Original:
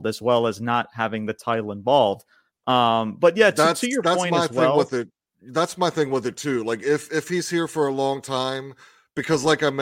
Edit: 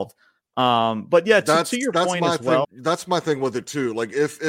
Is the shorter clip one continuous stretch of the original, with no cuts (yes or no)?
no